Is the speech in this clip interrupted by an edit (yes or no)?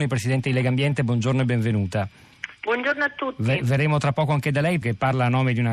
yes